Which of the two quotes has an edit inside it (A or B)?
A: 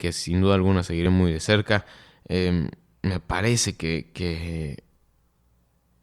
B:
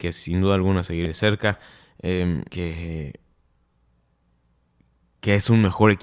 B